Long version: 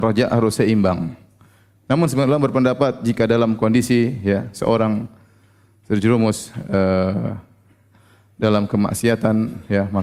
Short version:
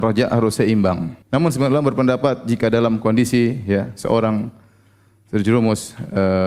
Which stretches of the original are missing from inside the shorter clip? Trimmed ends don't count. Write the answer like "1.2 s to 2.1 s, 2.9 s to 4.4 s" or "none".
1.2 s to 1.8 s